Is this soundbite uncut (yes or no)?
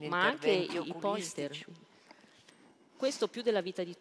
yes